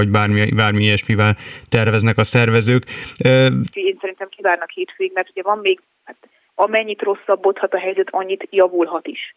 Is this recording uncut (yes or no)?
no